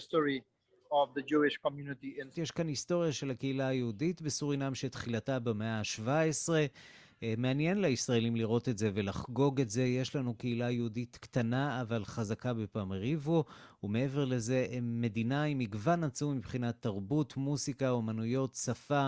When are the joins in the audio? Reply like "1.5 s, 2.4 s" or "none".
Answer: 2.3 s